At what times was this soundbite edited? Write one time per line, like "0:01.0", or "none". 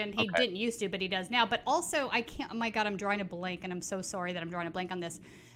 none